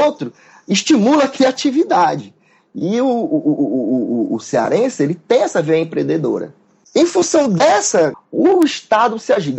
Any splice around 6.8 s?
yes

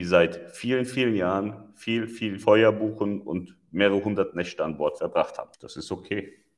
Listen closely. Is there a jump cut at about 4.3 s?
no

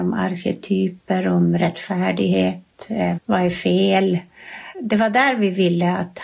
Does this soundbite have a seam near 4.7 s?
yes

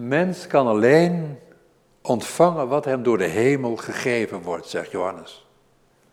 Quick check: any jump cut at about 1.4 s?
no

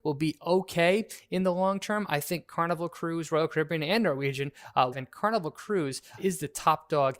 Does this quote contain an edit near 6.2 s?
yes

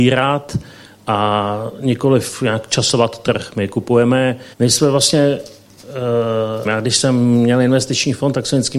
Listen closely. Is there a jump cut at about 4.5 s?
yes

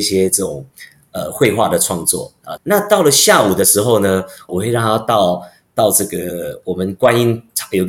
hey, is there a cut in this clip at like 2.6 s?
yes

